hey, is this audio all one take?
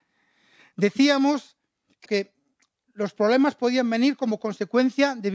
no; 1 cut; at 2.1 s

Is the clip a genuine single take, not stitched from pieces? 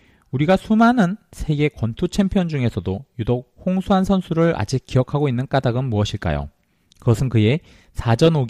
yes; 0 cuts

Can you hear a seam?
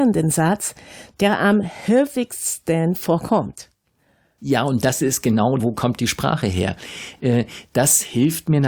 yes; 2 cuts; at 4.4 s, 5.6 s

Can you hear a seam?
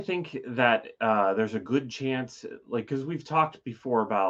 no; 0 cuts

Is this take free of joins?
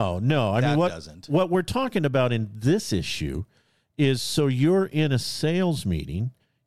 yes; 0 cuts

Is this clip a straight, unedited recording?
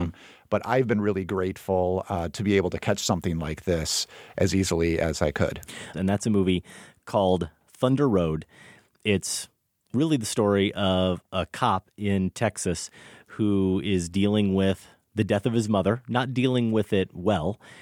no; 1 cut; at 5.9 s

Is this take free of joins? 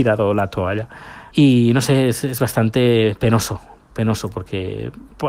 no; 1 cut; at 1.3 s

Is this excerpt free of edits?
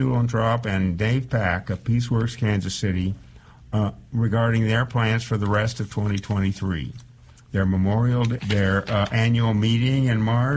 no; 1 cut; at 8.4 s

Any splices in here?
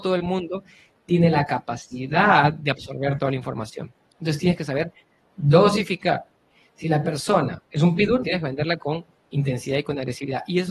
yes; 1 cut; at 8.2 s

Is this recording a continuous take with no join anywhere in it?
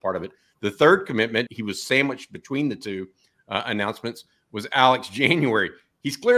no; 1 cut; at 1.5 s

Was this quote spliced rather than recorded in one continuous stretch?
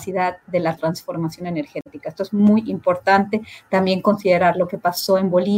no; 0 cuts

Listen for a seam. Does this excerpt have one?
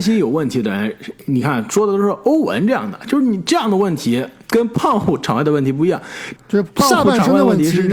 yes; 1 cut; at 6.4 s

